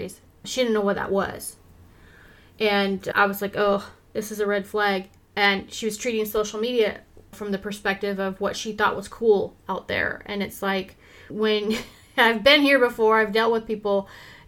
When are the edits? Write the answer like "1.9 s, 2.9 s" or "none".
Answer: none